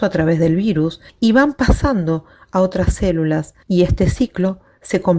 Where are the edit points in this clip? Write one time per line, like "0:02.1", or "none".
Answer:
0:01.1
0:03.6